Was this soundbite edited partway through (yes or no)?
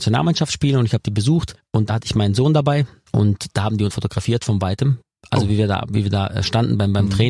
yes